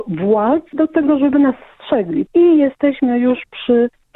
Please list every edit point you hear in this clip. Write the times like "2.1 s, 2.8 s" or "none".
2.3 s